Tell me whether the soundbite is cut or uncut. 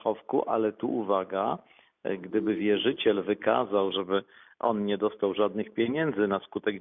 cut